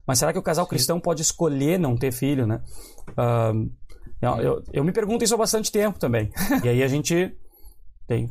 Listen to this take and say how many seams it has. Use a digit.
1